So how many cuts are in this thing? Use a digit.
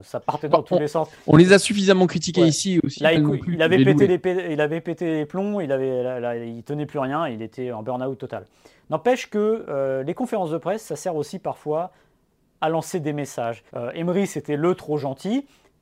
2